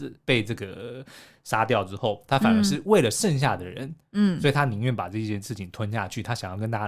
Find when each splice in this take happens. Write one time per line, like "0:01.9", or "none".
0:02.3